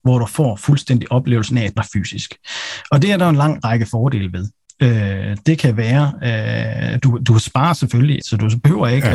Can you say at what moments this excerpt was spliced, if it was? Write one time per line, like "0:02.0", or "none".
0:01.8
0:08.2